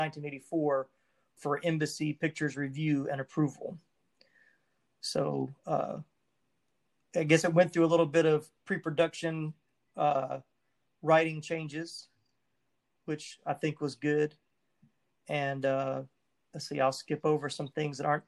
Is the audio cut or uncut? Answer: uncut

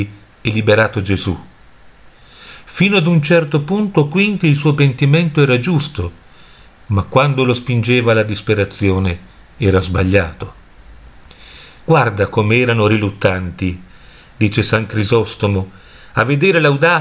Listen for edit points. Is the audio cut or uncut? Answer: uncut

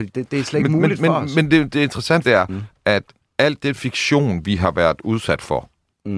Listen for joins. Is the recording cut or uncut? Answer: cut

